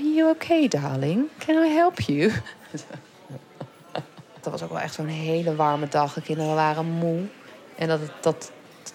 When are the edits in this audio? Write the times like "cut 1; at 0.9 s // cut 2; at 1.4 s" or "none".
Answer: cut 1; at 4.4 s